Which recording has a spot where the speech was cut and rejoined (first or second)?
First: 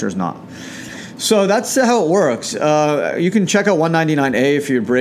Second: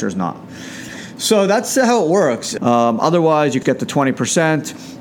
second